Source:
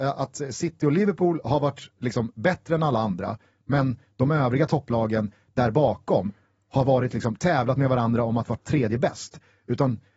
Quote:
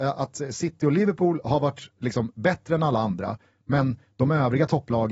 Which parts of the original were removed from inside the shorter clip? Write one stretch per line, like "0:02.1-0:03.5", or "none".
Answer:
none